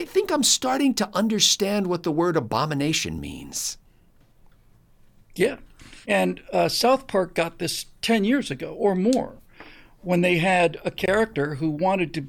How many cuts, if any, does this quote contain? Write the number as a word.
one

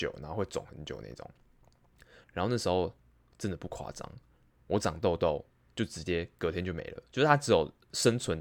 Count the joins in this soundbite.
one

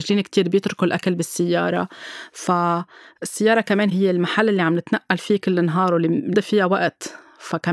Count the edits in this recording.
one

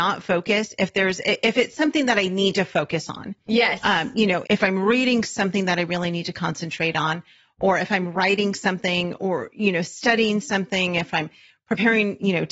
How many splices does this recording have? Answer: one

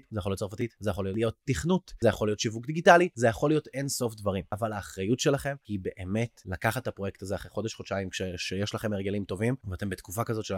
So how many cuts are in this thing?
zero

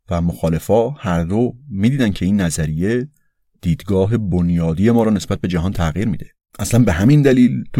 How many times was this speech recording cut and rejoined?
one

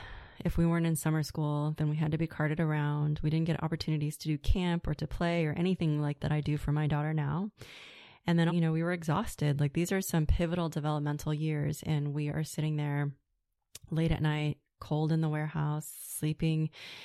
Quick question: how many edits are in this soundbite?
two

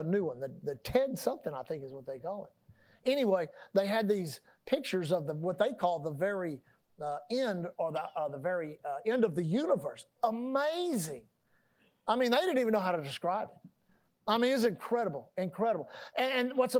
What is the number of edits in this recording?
zero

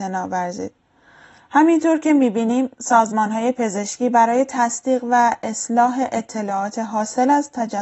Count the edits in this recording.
zero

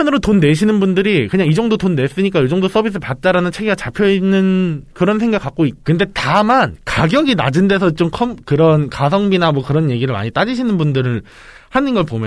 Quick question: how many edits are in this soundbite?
one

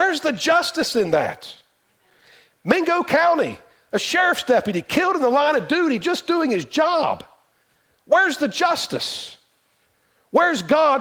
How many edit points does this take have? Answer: zero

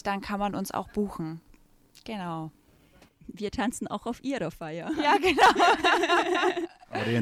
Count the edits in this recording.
zero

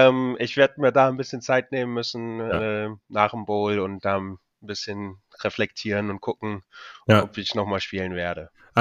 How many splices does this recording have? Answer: zero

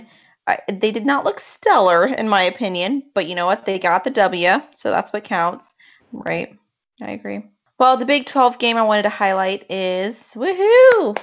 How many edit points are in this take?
one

